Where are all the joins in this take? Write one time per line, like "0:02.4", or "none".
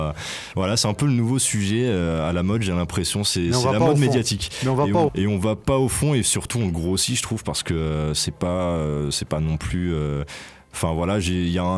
0:05.1